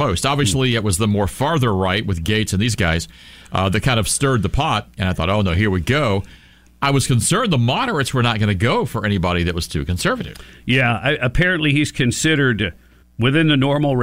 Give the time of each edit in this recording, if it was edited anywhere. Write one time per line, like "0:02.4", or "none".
0:13.0